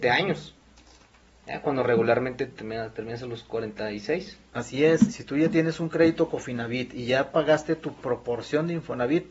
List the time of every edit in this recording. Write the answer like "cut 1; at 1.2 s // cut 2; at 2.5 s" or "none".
cut 1; at 5.1 s